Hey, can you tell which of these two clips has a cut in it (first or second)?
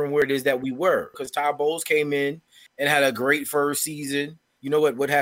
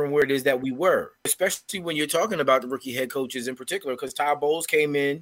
first